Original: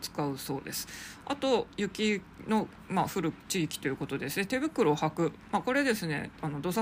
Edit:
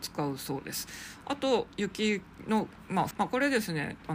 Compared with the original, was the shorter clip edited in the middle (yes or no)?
yes